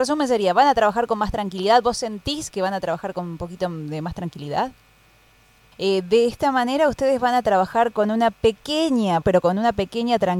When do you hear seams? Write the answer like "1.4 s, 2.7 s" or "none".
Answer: 5.7 s, 9.2 s